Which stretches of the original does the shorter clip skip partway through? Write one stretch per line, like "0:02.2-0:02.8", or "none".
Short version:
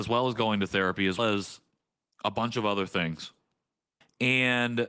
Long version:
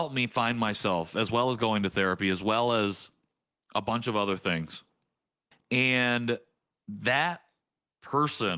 0:02.4-0:02.7